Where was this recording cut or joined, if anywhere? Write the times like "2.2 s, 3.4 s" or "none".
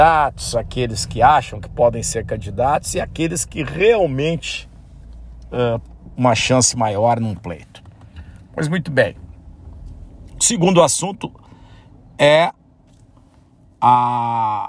6.2 s